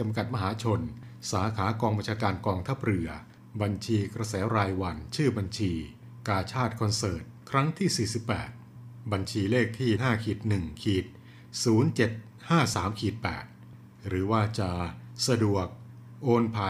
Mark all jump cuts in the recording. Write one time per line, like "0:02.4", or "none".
0:10.0
0:12.7